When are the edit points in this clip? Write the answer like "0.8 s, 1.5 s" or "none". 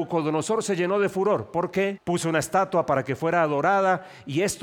2.0 s

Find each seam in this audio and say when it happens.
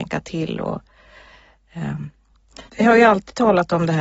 2.7 s

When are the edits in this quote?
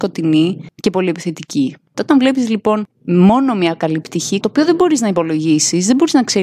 1.9 s, 4.4 s

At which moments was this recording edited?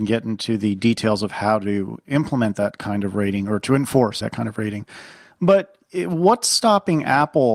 4.2 s

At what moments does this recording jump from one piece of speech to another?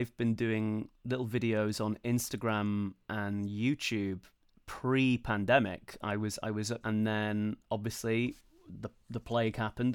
6.8 s

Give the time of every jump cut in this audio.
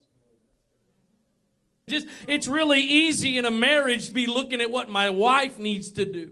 1.9 s, 4.1 s

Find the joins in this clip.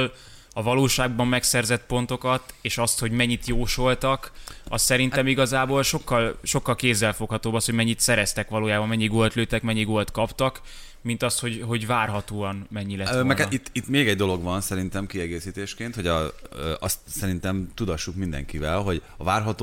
none

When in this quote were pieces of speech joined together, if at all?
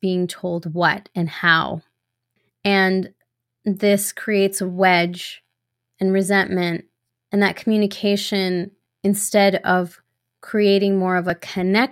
none

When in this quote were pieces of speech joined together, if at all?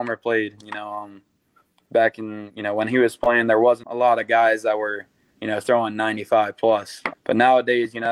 3.8 s, 7.1 s

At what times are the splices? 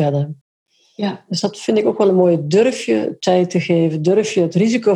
none

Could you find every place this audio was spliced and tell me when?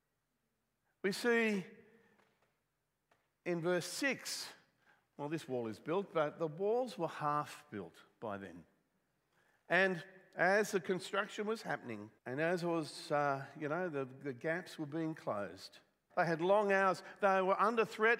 12.2 s, 16.1 s

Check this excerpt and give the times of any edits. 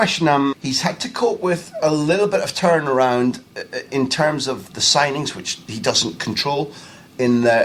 none

